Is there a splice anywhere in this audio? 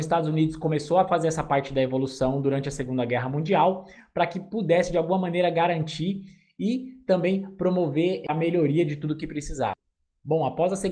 no; 0 cuts

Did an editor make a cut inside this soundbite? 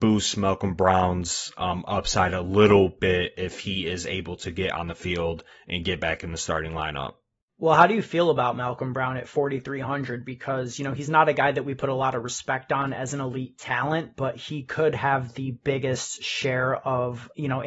no; 0 cuts

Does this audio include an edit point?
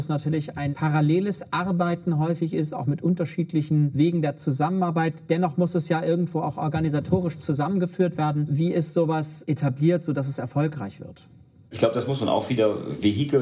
no; 0 cuts

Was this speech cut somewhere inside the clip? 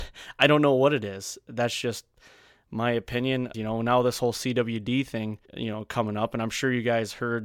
yes; 2 cuts; at 3.5 s, 5.5 s

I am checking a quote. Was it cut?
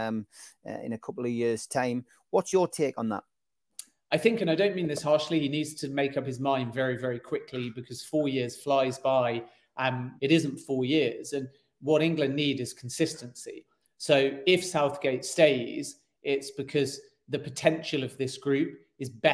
yes; 1 cut; at 10.2 s

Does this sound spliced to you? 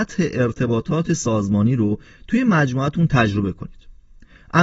no; 0 cuts

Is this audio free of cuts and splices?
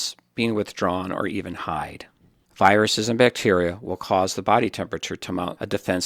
yes; 0 cuts

